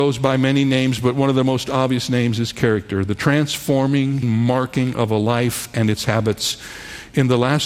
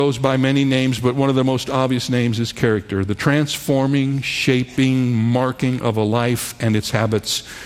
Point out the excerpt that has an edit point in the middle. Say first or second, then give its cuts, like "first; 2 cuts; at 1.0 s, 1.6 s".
first; 1 cut; at 4.2 s